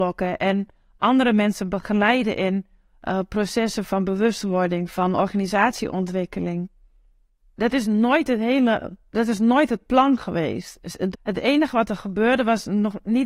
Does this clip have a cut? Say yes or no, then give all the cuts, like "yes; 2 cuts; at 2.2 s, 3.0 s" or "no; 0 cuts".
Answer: yes; 1 cut; at 11.1 s